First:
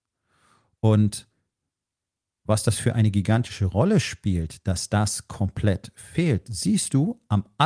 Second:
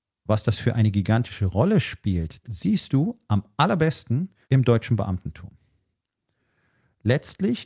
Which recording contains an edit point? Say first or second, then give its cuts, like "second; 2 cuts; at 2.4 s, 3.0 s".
second; 2 cuts; at 2.4 s, 4.4 s